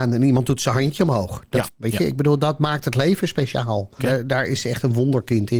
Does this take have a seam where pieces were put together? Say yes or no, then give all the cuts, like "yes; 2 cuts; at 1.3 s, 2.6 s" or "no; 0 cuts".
yes; 2 cuts; at 1.7 s, 4.0 s